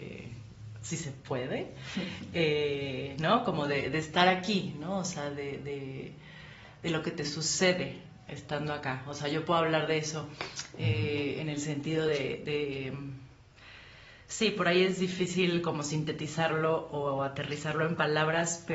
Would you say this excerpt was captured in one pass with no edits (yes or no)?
yes